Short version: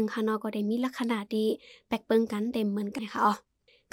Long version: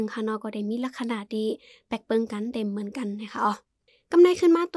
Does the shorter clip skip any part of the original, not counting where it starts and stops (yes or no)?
yes